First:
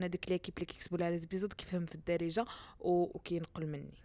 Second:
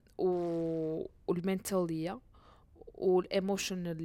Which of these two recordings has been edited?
first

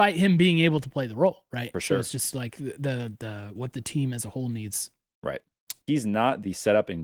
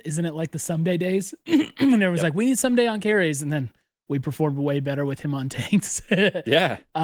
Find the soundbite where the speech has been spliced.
first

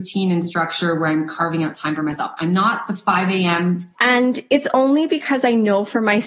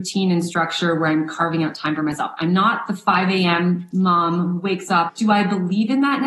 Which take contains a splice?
first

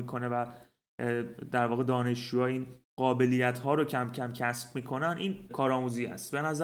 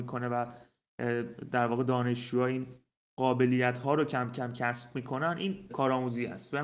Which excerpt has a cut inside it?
first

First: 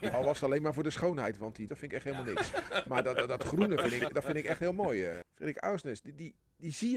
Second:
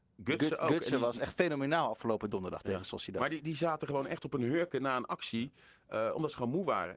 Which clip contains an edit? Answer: first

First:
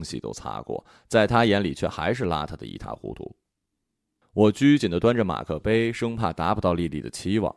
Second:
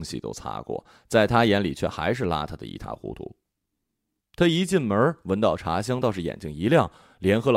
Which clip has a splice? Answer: second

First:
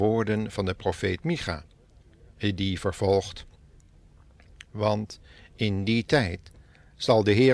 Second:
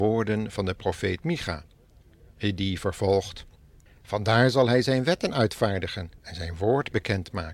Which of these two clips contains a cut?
second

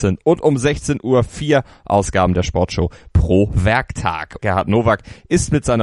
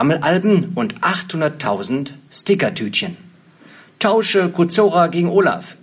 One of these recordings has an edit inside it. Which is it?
first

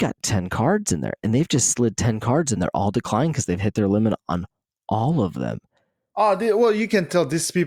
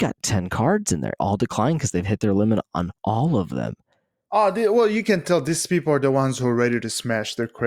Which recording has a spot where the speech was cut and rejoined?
second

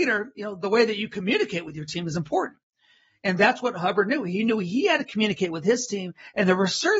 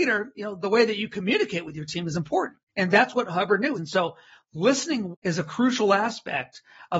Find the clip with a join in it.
second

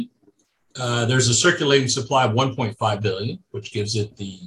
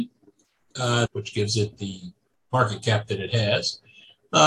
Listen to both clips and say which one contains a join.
second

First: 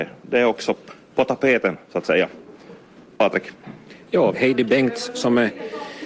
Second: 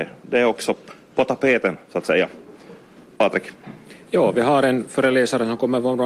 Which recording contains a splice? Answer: first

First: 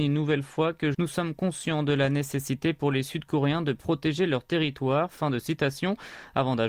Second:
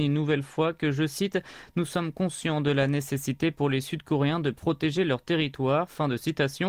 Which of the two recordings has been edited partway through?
first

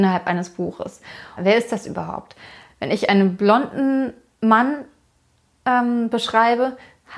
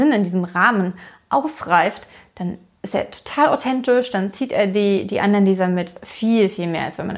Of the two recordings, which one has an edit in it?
first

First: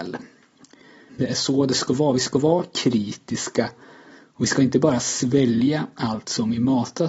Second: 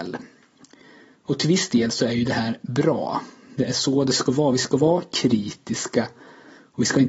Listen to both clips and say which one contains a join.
first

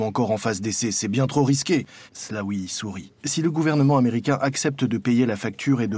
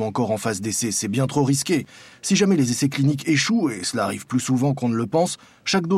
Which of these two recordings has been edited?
first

